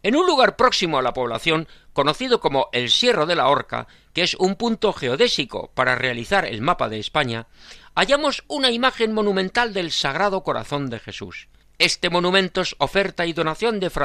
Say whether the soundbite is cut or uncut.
cut